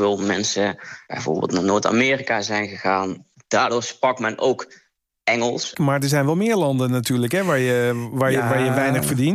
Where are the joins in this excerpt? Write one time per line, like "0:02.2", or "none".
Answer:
0:05.7